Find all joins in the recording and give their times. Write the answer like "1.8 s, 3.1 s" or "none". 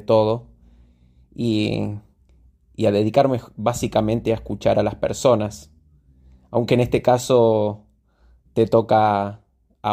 8.5 s